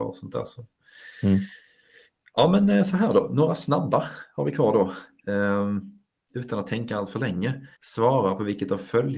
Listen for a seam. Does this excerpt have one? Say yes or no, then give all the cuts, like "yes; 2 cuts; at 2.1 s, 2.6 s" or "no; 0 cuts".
yes; 2 cuts; at 6.3 s, 7.7 s